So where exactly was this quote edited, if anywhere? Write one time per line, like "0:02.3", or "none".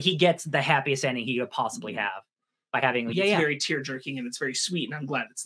0:03.1